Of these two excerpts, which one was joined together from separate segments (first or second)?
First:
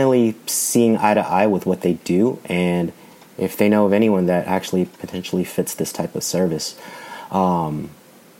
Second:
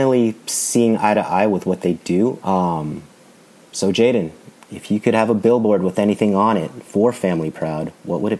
second